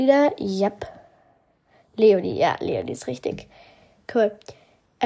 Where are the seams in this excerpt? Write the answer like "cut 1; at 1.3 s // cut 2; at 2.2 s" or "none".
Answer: none